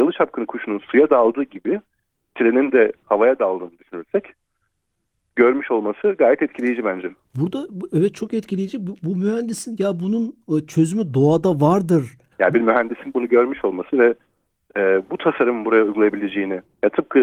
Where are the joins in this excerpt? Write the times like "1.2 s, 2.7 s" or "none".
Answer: 12.3 s